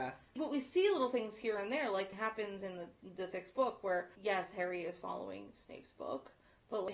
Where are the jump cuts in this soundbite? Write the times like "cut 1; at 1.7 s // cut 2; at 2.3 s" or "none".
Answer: cut 1; at 2.1 s